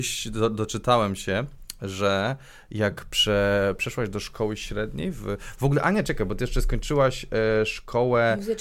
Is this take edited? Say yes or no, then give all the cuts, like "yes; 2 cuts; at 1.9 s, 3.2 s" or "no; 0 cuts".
no; 0 cuts